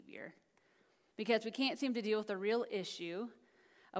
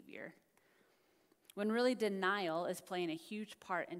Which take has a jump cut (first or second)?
first